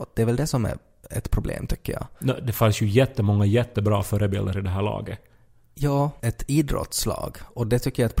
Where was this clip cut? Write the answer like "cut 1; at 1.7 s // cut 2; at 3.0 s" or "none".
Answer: cut 1; at 6.2 s